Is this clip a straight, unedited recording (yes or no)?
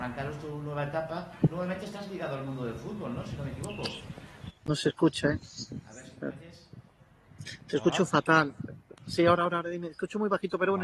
no